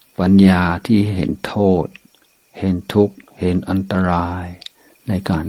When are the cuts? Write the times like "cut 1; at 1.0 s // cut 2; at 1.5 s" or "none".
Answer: none